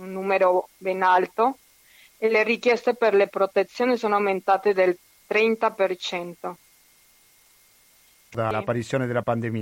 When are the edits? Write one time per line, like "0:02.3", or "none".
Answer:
0:08.3